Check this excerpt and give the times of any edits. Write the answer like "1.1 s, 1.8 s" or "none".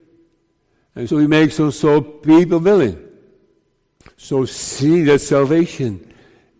1.1 s, 4.0 s